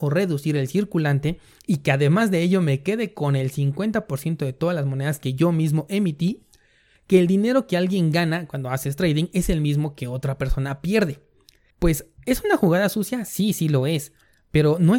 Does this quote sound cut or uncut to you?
cut